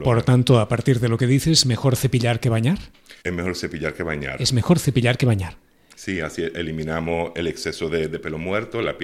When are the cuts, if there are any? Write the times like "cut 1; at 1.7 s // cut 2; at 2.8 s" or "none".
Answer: cut 1; at 3.2 s